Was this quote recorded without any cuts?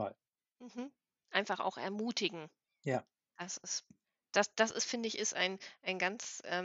yes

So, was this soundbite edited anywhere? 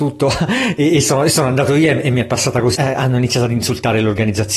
yes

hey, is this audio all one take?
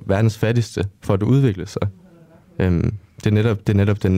no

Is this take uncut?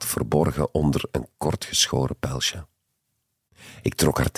yes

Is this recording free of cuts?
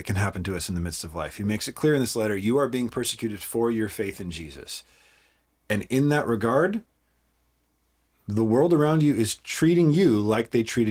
yes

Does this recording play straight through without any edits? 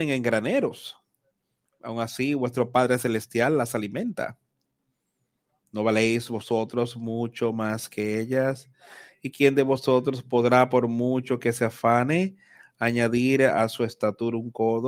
yes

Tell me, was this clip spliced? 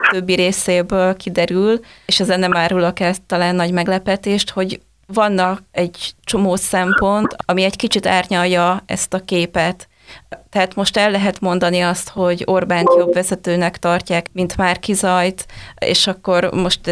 no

